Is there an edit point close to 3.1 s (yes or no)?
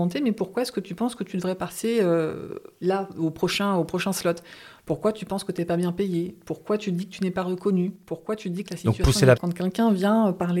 no